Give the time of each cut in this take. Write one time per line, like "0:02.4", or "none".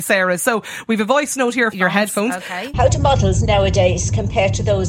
0:01.7
0:02.7